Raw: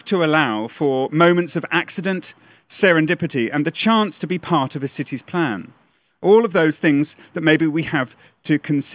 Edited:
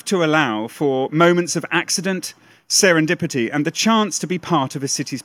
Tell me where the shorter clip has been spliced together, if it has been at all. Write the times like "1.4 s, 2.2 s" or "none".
none